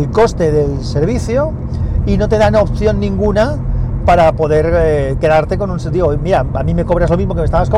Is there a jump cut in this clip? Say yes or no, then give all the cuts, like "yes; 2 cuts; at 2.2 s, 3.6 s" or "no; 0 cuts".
no; 0 cuts